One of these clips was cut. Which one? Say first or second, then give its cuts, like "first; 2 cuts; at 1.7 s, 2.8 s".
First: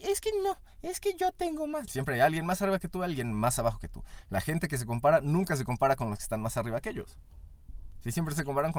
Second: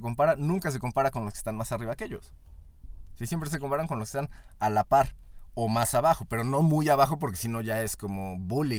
first; 1 cut; at 1.9 s